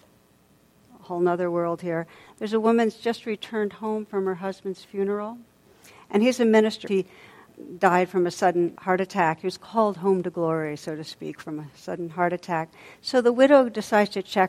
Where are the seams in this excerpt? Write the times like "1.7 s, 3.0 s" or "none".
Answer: 6.9 s